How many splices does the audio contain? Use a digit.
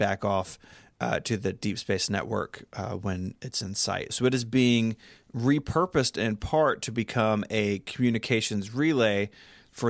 1